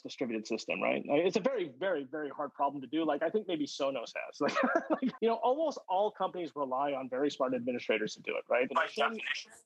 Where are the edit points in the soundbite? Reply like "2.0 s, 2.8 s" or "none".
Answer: 5.2 s, 8.7 s